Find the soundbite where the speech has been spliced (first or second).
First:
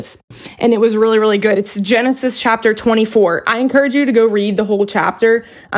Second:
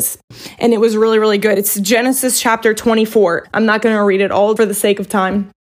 second